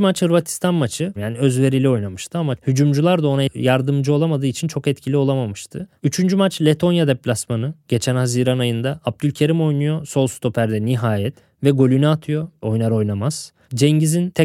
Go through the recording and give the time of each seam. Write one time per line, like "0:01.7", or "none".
0:01.2
0:06.0